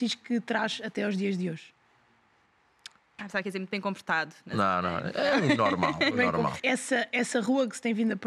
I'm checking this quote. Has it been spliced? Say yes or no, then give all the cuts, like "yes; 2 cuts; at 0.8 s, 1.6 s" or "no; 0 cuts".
yes; 2 cuts; at 3.2 s, 6.6 s